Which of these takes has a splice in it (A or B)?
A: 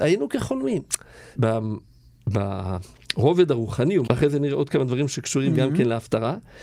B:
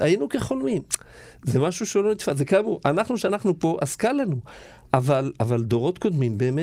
A